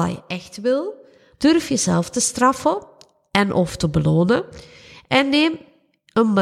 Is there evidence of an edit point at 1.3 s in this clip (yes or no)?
yes